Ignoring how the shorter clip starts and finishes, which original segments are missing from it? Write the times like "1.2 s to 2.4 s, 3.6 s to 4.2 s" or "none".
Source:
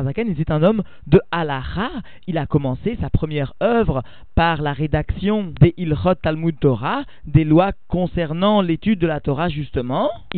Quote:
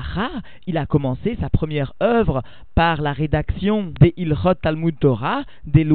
none